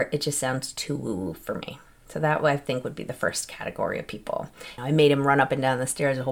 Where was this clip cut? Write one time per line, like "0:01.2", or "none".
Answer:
0:04.8